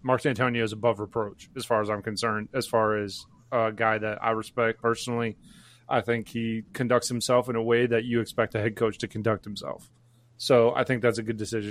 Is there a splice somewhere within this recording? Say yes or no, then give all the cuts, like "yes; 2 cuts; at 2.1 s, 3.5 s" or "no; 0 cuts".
no; 0 cuts